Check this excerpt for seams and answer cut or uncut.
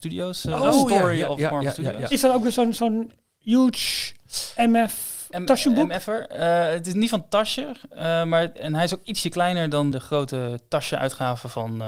cut